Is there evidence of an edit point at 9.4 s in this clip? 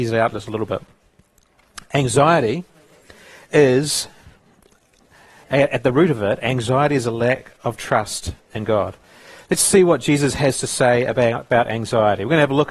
no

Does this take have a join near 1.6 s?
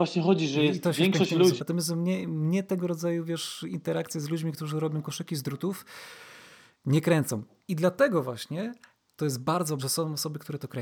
yes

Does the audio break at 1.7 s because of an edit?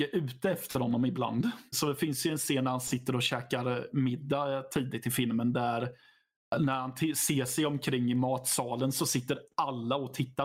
yes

